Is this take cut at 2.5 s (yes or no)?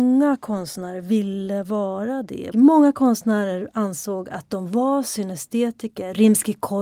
yes